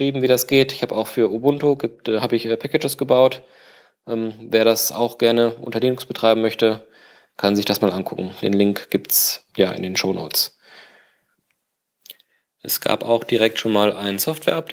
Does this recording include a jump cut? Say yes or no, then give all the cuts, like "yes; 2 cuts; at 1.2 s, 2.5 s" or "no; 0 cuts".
yes; 1 cut; at 9.5 s